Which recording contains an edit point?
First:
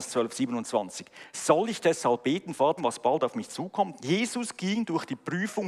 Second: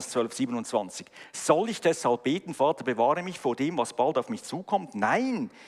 first; 2 cuts; at 2.8 s, 4.0 s

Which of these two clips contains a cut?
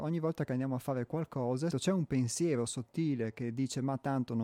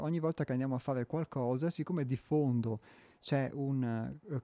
first; 1 cut; at 1.7 s

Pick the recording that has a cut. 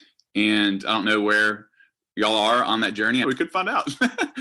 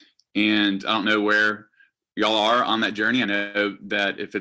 first; 1 cut; at 3.2 s

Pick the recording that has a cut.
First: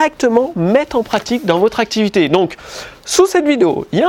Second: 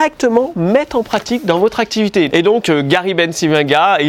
second; 1 cut; at 2.3 s

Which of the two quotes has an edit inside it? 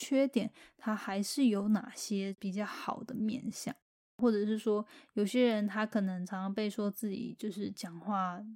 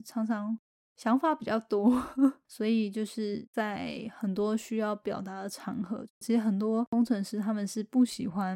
second; 2 cuts; at 2.4 s, 6.2 s

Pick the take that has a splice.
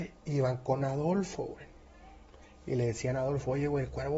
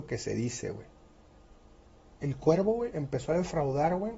second; 1 cut; at 2.2 s

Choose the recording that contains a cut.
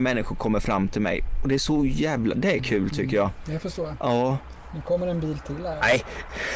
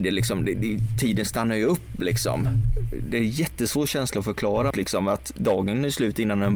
second; 1 cut; at 4.7 s

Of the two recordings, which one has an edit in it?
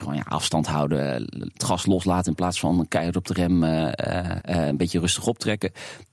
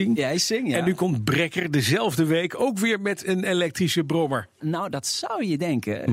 first; 1 cut; at 4.4 s

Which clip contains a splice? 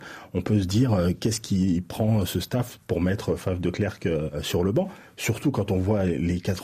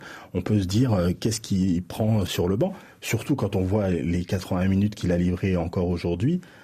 second; 1 cut; at 2.3 s

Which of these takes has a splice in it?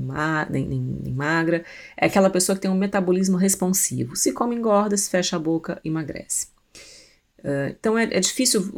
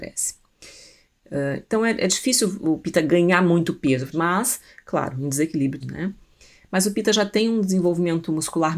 second; 2 cuts; at 4.1 s, 5.8 s

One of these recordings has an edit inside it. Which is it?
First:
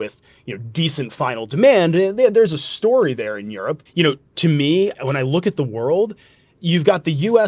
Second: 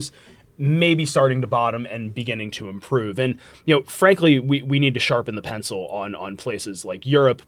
first; 2 cuts; at 3.9 s, 4.9 s

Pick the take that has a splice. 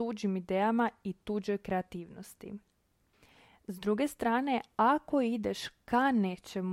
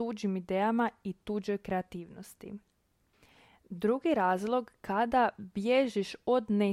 first; 1 cut; at 3.6 s

